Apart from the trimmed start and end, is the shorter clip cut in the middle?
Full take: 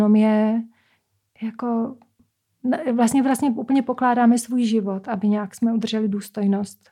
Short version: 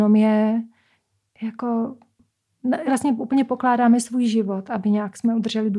yes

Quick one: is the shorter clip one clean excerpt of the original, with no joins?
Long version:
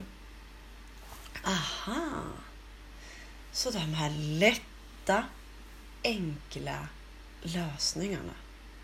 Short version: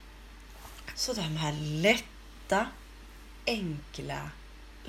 no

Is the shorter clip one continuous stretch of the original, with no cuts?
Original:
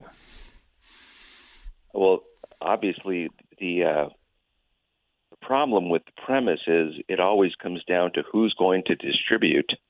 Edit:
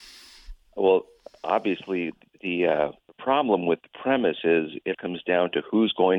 no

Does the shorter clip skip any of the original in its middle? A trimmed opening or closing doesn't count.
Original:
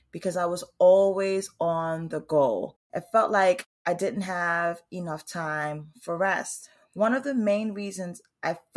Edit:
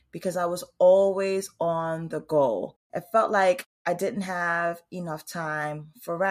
no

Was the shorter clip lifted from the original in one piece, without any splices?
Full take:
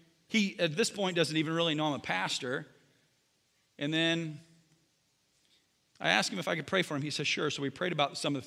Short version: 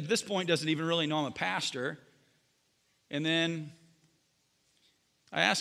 yes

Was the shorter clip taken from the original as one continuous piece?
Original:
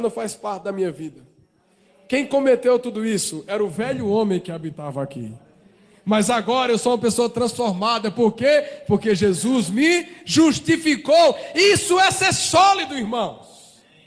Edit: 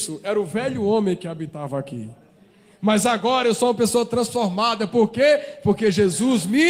yes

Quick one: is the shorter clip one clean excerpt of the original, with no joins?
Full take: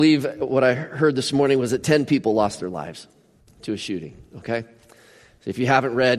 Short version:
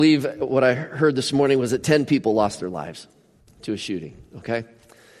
yes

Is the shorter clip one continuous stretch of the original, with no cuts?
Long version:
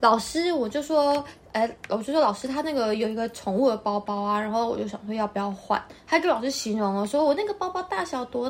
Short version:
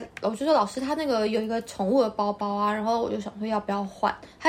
yes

